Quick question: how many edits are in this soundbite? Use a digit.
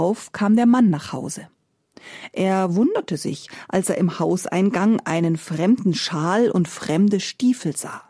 0